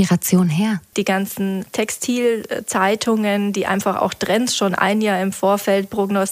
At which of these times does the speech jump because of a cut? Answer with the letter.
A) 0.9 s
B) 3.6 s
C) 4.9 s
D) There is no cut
A